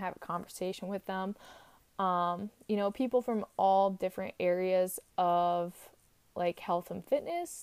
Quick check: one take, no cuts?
yes; 0 cuts

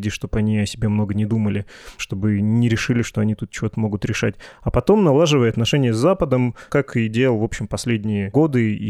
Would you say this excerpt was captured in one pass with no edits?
no; 1 cut; at 6.7 s

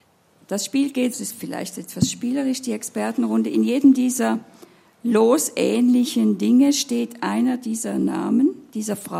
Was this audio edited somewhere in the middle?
yes; 1 cut; at 1.1 s

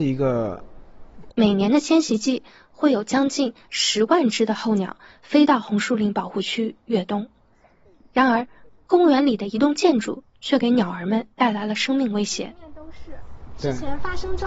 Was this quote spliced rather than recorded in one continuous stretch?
yes; 2 cuts; at 1.3 s, 11.3 s

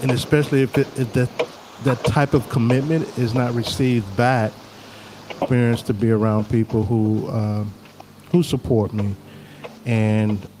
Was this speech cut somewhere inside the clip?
yes; 1 cut; at 5.4 s

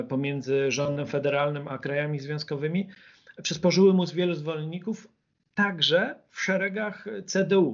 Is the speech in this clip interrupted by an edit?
no; 0 cuts

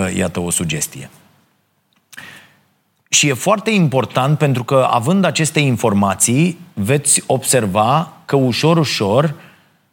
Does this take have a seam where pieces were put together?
no; 0 cuts

